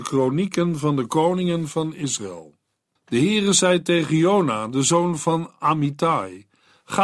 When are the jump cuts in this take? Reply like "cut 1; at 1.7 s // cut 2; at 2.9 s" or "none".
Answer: cut 1; at 3.0 s